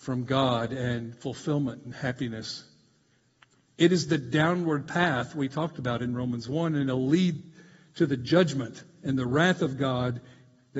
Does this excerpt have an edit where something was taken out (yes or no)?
no